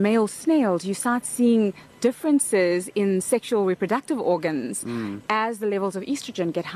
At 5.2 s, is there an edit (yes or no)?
no